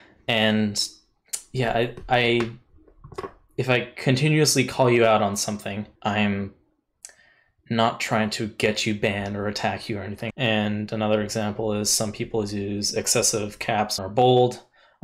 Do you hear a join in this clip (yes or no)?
yes